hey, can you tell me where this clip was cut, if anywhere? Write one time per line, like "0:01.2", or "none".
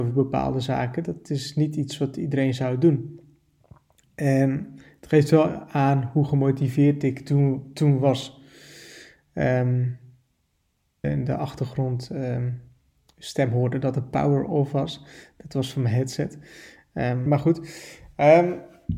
0:11.0
0:17.3